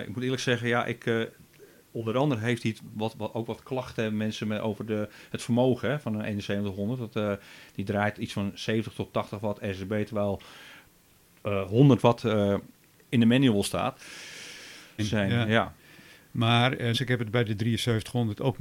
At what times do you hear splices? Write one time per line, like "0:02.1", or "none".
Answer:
0:15.0
0:16.9